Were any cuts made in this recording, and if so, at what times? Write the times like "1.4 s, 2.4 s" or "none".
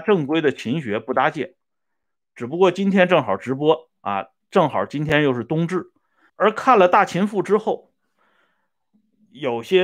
6.3 s